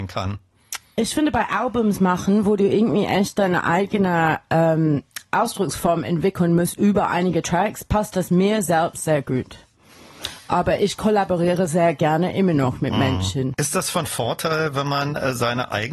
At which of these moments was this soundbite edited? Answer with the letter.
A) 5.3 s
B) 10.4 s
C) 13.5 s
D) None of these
C